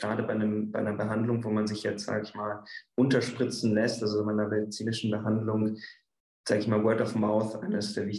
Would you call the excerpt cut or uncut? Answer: uncut